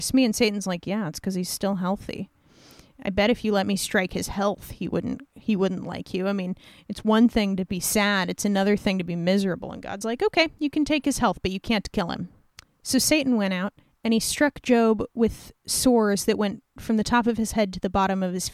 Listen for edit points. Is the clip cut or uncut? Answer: uncut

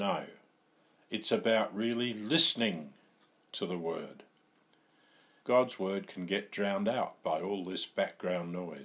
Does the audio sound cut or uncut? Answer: cut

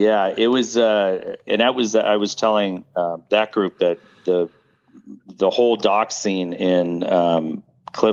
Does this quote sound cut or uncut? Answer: cut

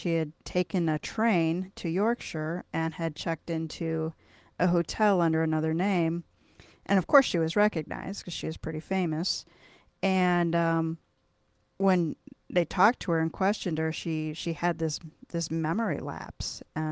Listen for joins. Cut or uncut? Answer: uncut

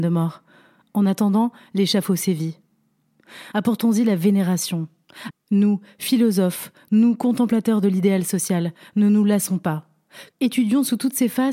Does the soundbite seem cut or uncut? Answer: cut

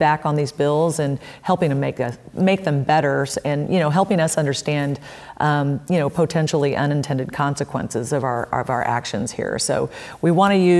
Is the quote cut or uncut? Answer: uncut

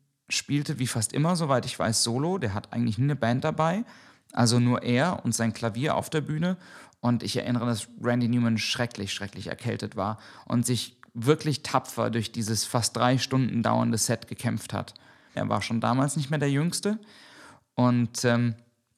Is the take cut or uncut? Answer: cut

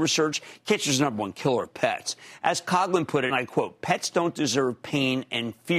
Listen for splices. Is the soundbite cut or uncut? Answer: cut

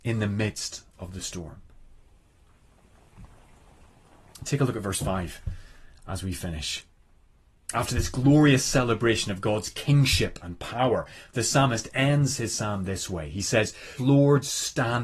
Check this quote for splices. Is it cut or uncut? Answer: cut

